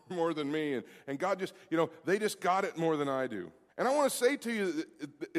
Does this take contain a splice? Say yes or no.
yes